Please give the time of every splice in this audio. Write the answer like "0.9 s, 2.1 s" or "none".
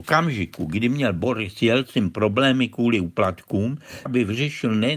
4.1 s